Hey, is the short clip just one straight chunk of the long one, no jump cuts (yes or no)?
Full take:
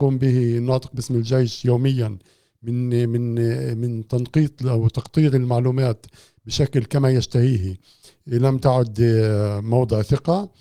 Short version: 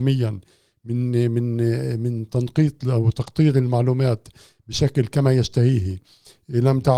yes